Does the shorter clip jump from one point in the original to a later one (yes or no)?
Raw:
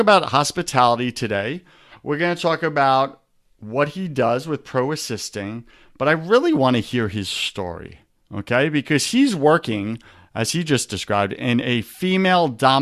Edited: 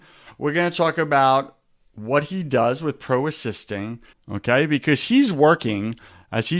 yes